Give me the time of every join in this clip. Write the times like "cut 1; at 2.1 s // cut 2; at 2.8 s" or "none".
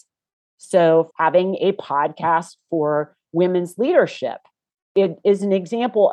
cut 1; at 1.1 s